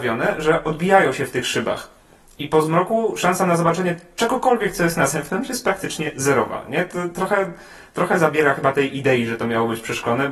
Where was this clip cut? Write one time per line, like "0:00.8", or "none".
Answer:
none

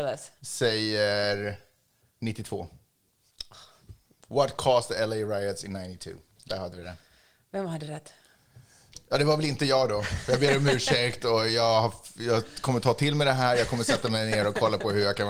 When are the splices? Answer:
none

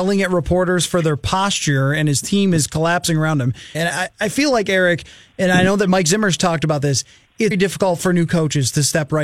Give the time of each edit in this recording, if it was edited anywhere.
0:03.7
0:07.5

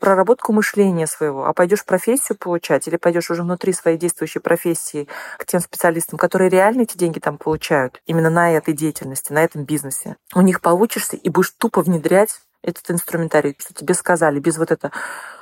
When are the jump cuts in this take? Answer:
0:13.6

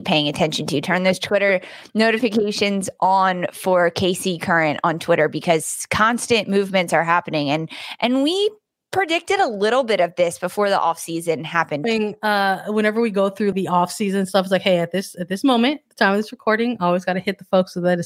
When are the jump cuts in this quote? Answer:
0:11.8
0:13.5

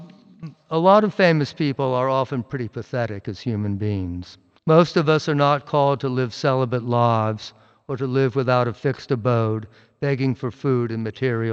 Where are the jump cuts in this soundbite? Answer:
0:04.6

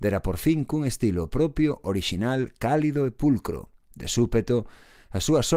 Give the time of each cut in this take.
none

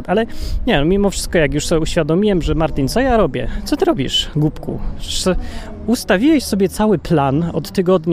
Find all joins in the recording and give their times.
none

